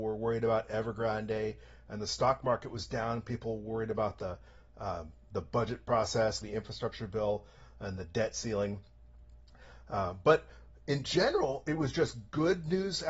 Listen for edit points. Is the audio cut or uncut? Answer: cut